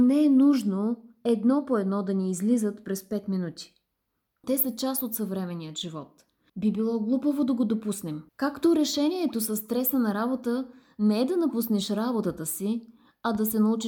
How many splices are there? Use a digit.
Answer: 3